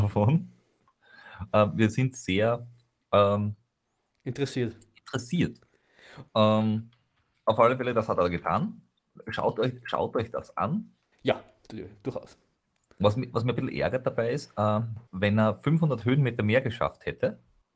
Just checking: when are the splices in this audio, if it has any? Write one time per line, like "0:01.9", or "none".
0:06.3
0:11.1
0:15.1